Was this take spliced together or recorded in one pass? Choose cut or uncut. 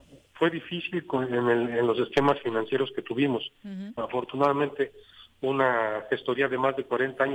cut